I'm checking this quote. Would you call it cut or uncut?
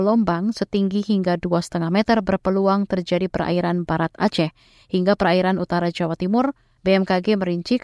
cut